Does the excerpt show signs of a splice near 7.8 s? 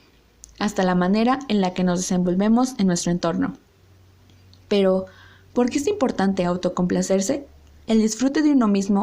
yes; 1 cut; at 7.8 s

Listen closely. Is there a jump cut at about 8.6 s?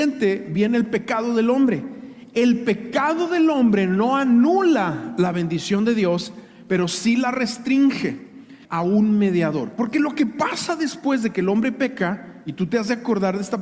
yes; 1 cut; at 8.6 s

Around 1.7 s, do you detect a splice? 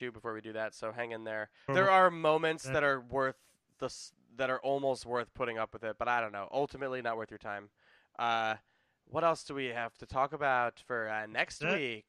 yes; 1 cut; at 1.7 s

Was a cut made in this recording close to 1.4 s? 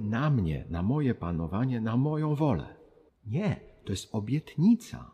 no; 1 cut; at 3.1 s

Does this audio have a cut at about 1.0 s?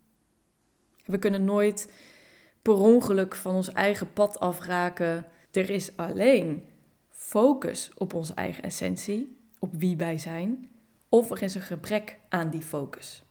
no; 1 cut; at 5.5 s

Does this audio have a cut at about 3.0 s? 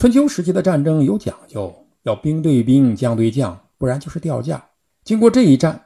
no; 1 cut; at 4.9 s

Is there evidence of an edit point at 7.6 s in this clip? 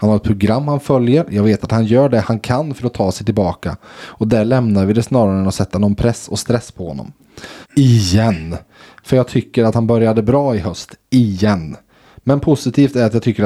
yes; 1 cut; at 7.6 s

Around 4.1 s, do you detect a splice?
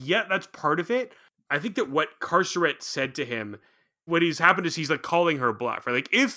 yes; 1 cut; at 4.1 s

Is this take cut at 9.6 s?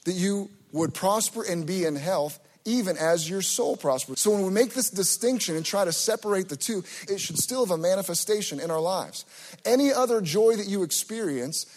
no; 2 cuts; at 4.1 s, 7.1 s

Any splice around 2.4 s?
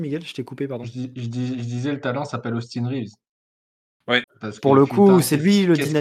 no; 1 cut; at 4.2 s

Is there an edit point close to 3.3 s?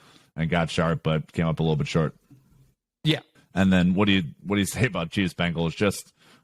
yes; 1 cut; at 3.3 s

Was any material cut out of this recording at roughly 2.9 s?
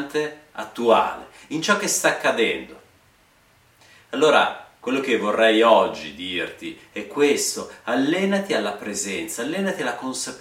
no; 0 cuts

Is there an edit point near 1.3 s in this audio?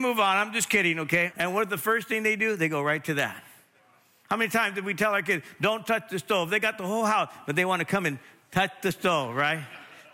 yes; 1 cut; at 1.3 s

